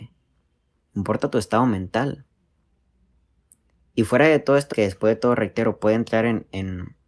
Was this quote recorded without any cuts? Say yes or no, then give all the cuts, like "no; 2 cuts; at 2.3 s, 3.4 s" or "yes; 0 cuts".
no; 1 cut; at 4.7 s